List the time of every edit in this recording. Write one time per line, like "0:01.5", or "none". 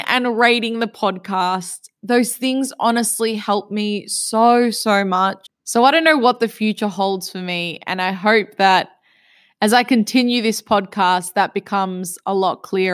0:05.4

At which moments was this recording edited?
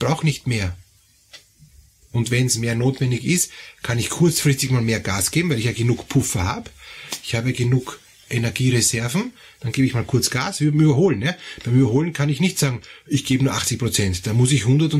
none

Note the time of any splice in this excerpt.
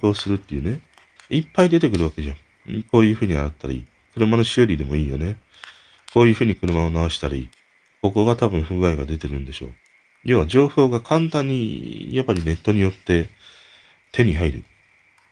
0:01.2

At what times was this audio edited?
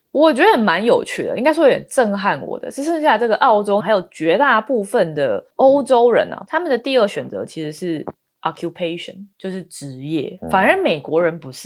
0:03.8
0:06.5

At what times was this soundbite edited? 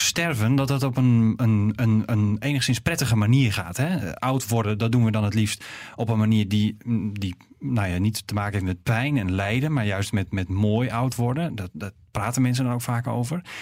none

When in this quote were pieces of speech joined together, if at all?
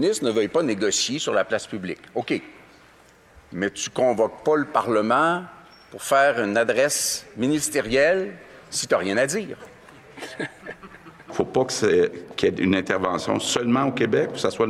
none

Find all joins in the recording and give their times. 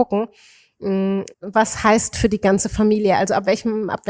0:01.3

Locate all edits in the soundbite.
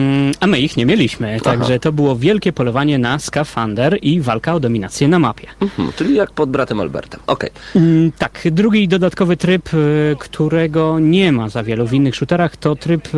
none

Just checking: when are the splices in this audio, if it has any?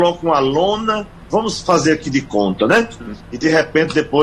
0:03.2

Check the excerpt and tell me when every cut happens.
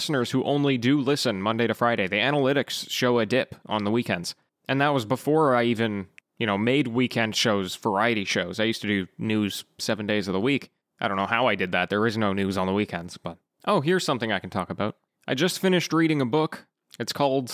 none

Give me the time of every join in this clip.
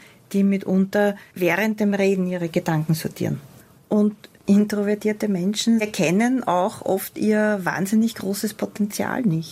none

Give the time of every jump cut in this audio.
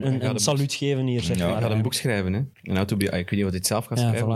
0:02.5

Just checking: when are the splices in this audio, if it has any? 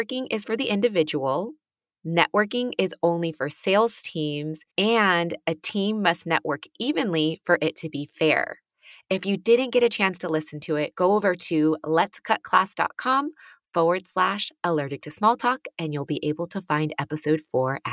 0:04.7

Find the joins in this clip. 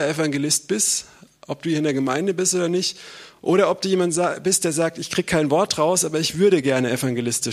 none

